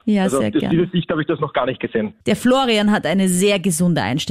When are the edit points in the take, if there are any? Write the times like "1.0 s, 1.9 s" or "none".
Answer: 2.2 s